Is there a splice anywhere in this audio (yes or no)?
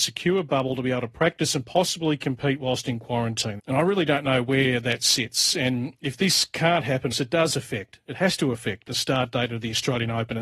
yes